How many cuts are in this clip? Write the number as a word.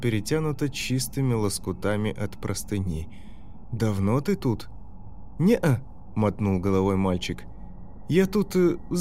one